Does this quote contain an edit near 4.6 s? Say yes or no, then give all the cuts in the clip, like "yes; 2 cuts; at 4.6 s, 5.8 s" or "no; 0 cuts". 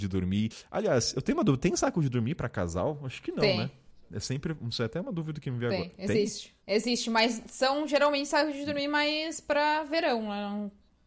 no; 1 cut; at 6.6 s